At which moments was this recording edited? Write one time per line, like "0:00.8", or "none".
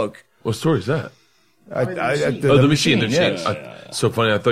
none

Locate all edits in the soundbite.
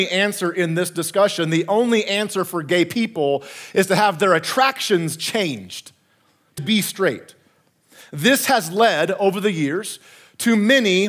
0:06.6

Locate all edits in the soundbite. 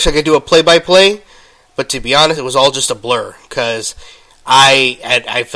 none

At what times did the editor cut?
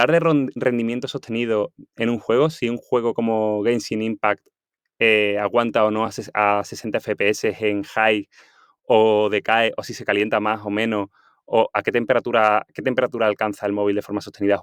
none

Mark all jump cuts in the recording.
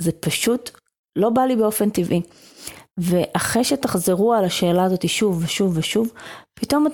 0:02.9

